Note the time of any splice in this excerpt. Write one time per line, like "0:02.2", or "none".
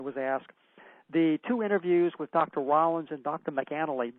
none